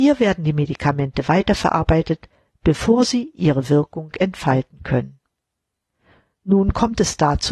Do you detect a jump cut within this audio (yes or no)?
no